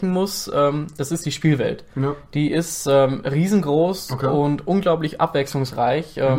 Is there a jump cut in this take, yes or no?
no